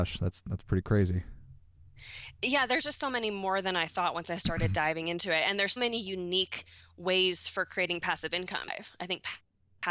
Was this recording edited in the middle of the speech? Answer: yes; 2 cuts; at 5.8 s, 8.7 s

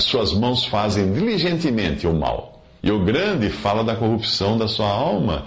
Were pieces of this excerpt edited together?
yes; 1 cut; at 2.8 s

